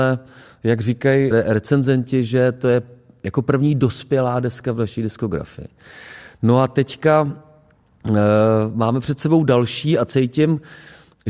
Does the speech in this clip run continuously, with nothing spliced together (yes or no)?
no